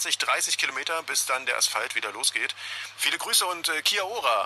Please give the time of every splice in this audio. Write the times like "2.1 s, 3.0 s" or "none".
2.9 s